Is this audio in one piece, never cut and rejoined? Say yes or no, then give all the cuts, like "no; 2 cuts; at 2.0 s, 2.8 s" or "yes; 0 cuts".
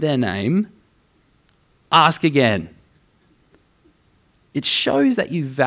yes; 0 cuts